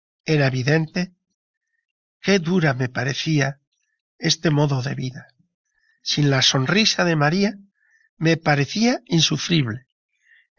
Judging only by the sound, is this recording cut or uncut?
uncut